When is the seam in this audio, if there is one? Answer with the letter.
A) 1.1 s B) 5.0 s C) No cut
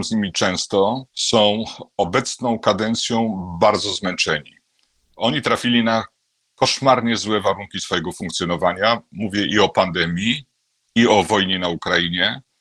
A